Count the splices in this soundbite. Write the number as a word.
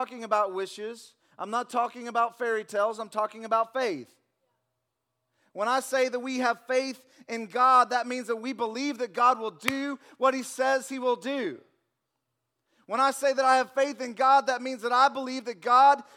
zero